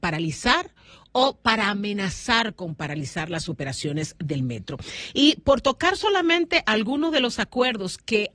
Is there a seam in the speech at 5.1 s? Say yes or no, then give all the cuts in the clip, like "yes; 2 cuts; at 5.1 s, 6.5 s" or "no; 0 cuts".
no; 0 cuts